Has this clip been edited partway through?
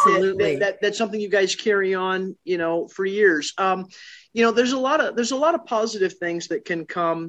no; 0 cuts

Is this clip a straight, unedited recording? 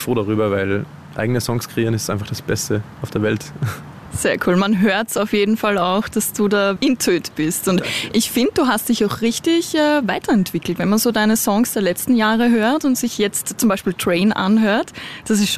no; 1 cut; at 6.8 s

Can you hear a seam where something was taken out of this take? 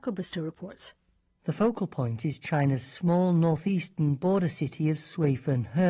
no; 0 cuts

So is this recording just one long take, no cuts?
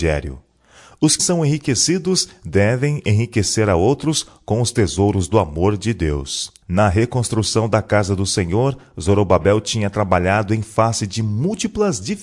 no; 2 cuts; at 1.2 s, 6.6 s

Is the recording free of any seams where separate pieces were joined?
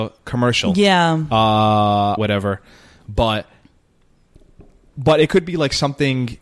no; 2 cuts; at 2.2 s, 4.9 s

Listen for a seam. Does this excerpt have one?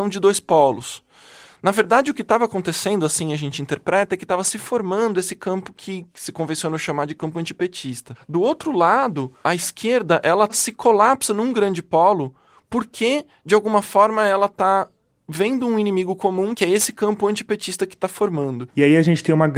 no; 0 cuts

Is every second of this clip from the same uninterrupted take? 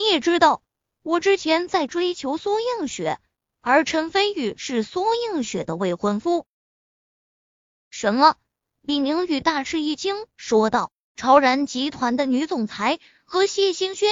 yes; 0 cuts

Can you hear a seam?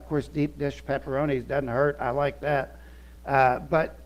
no; 0 cuts

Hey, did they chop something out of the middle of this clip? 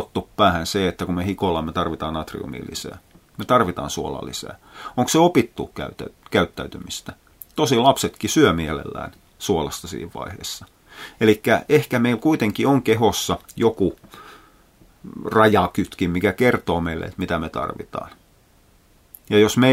no; 0 cuts

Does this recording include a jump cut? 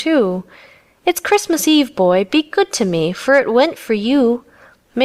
no; 0 cuts

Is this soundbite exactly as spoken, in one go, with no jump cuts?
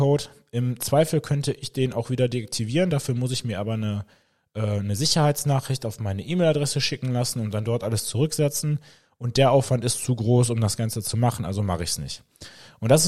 yes; 0 cuts

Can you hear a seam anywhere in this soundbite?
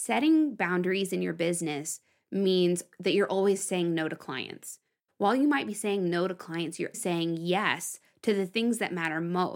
yes; 2 cuts; at 5.1 s, 6.9 s

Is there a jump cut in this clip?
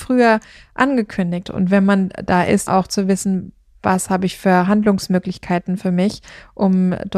yes; 2 cuts; at 1.4 s, 2.7 s

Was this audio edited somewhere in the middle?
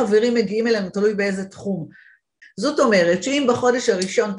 yes; 1 cut; at 2.4 s

